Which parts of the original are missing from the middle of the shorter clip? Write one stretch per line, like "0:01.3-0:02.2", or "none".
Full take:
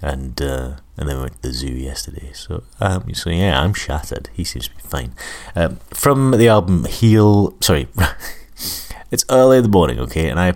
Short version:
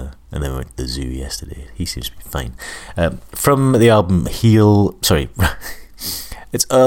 0:02.3-0:04.3